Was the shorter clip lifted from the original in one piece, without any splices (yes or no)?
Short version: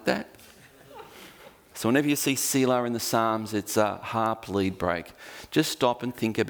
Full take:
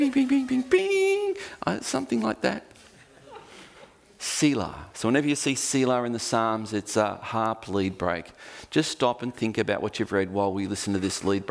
no